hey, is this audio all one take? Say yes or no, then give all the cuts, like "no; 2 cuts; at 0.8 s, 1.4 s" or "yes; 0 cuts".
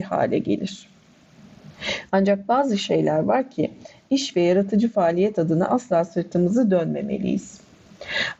no; 1 cut; at 2.1 s